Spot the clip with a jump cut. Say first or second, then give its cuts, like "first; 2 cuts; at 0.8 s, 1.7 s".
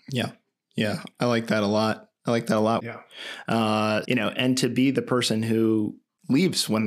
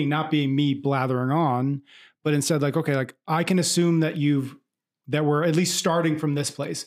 first; 2 cuts; at 2.8 s, 4.0 s